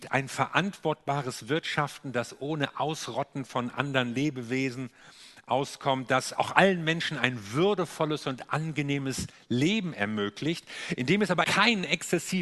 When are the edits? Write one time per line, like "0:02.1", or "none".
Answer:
0:11.4